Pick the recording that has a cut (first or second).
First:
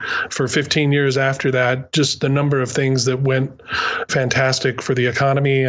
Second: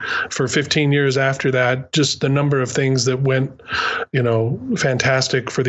first